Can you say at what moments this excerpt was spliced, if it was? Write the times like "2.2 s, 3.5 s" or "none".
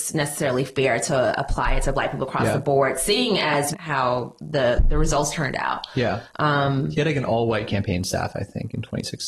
3.7 s